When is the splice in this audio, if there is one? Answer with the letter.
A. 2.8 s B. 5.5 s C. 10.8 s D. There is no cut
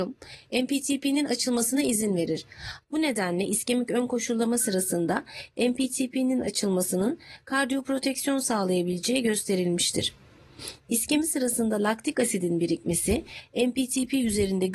A